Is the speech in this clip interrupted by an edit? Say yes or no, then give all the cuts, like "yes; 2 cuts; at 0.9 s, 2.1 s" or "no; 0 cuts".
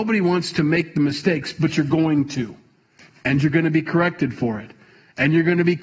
no; 0 cuts